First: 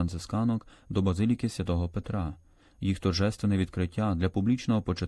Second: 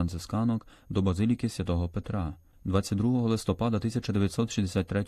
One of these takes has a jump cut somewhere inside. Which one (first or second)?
second